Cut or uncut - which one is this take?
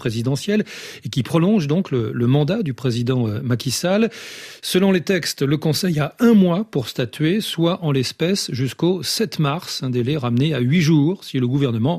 uncut